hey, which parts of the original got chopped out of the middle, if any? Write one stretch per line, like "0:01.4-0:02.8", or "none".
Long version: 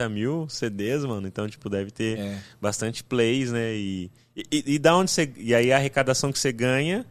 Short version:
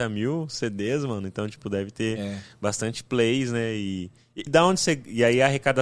0:04.5-0:04.8